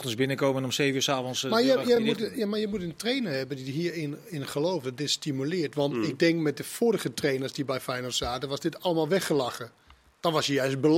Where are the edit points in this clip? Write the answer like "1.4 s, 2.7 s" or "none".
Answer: none